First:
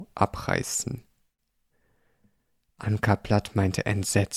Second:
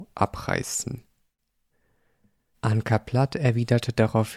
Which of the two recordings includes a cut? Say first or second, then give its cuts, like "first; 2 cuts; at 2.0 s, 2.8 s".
second; 1 cut; at 2.5 s